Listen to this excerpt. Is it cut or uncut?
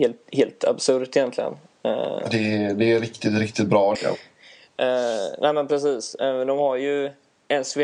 cut